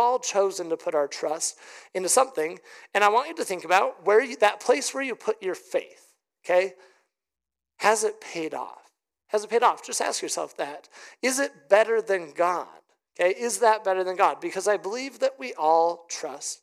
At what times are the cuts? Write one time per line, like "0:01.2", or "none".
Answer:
none